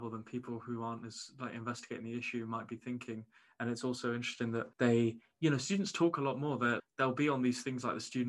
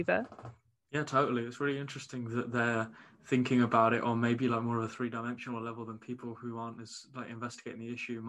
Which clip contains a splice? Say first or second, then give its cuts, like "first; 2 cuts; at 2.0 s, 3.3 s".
first; 2 cuts; at 4.7 s, 6.8 s